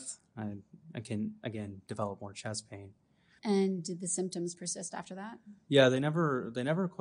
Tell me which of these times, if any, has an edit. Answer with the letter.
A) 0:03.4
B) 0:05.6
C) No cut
A